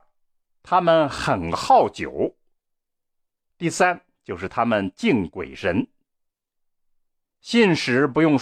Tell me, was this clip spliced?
no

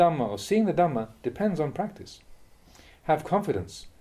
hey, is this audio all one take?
yes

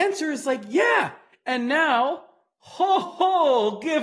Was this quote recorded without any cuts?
no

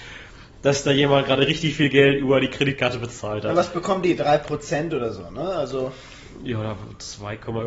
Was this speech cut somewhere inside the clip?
no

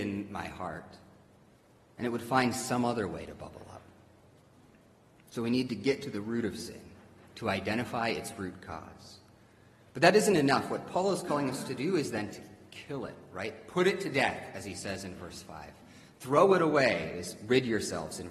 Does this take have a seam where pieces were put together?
no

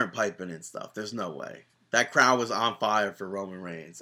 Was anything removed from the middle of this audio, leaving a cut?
no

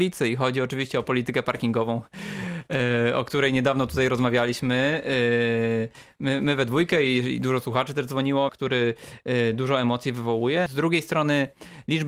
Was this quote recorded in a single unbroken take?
no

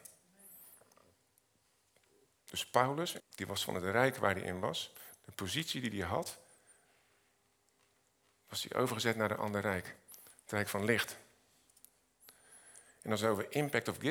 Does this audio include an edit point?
yes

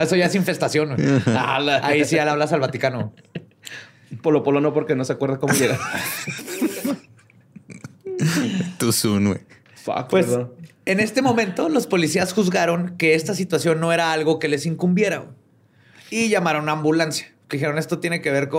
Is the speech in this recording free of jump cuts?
yes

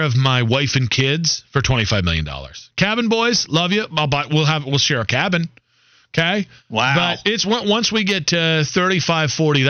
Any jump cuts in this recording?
no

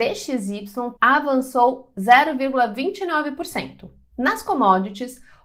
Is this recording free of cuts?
no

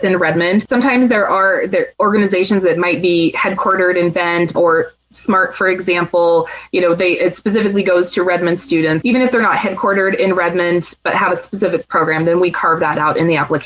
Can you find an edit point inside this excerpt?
yes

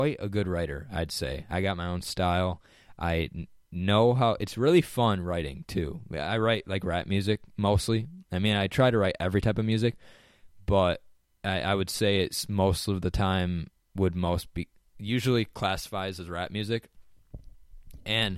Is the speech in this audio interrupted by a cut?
no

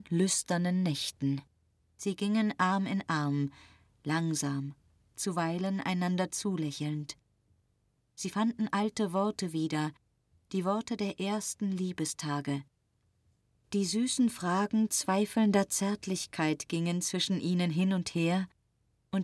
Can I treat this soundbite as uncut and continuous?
no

